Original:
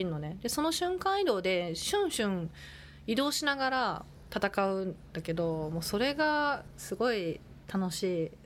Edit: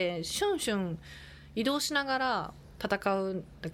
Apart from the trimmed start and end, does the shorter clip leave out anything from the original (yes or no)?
no